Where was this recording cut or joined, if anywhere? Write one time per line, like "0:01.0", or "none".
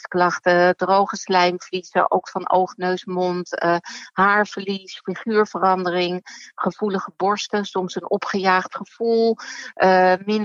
none